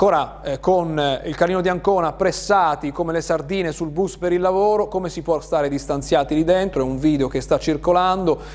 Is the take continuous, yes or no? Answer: yes